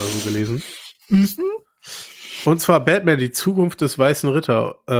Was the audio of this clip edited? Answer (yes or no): no